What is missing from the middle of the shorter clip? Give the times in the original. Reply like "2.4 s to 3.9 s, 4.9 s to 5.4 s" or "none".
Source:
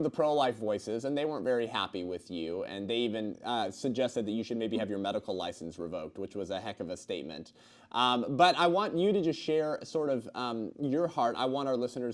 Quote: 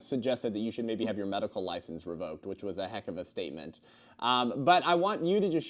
none

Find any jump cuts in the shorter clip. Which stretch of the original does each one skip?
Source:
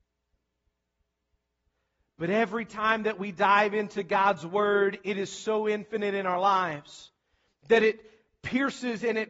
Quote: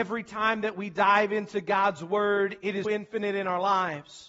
5.3 s to 5.6 s

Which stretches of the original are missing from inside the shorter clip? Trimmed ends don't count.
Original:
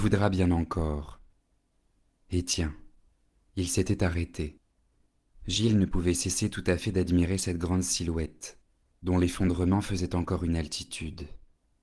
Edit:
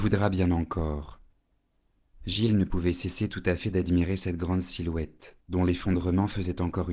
2.1 s to 5.3 s, 8.6 s to 9.0 s

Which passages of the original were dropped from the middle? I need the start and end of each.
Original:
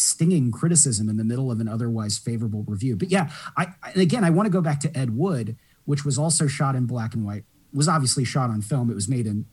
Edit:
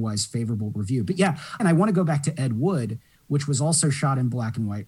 3.5 s to 4.2 s

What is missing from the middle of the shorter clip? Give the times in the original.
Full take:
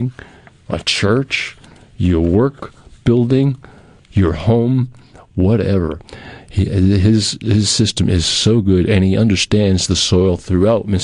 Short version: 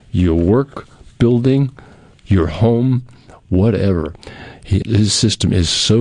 6.7 s to 7.4 s

